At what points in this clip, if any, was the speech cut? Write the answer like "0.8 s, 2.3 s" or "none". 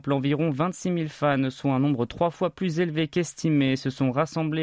none